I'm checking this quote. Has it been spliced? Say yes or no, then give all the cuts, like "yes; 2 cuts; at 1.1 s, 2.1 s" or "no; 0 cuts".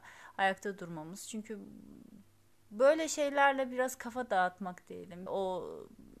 yes; 1 cut; at 5.3 s